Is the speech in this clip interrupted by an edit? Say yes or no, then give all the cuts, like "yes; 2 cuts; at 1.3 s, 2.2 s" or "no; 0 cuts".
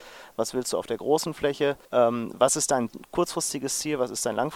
yes; 1 cut; at 1.9 s